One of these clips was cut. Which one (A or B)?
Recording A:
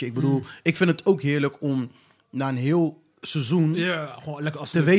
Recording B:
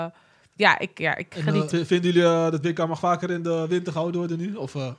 B